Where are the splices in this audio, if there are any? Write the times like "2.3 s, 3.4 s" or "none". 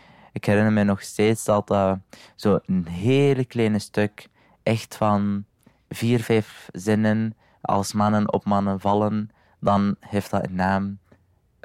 none